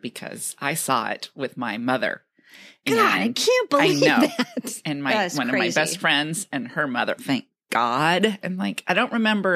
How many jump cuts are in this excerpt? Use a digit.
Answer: 2